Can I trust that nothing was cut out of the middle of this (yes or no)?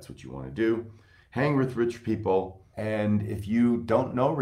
no